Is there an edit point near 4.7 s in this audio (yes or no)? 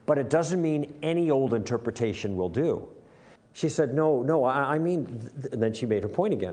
no